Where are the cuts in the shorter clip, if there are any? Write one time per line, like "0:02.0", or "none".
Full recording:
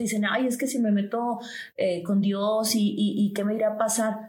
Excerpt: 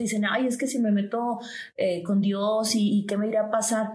0:02.9